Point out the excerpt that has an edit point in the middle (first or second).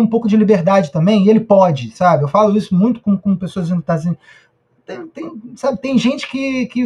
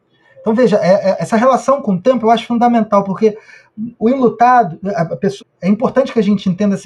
second